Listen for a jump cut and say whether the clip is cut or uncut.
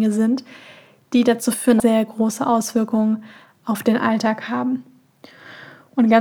cut